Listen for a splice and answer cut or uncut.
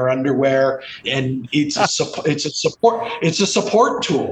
cut